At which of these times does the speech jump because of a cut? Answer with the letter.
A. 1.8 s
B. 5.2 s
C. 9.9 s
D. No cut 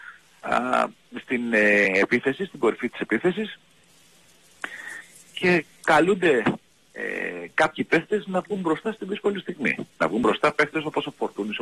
D